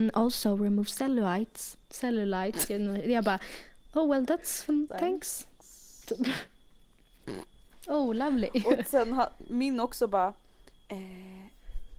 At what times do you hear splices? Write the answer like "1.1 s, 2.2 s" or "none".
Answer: 1.8 s, 4.9 s